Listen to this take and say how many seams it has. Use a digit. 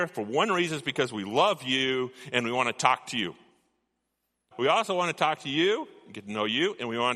1